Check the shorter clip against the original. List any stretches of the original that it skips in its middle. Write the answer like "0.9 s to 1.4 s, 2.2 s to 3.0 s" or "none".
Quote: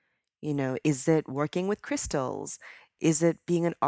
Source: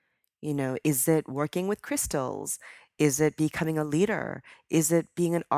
3.0 s to 4.6 s